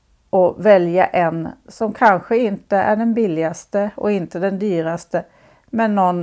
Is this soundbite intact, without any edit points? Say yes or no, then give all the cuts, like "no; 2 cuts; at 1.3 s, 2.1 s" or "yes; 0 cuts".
yes; 0 cuts